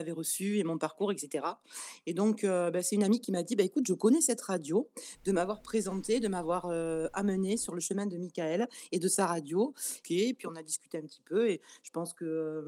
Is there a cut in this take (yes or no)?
yes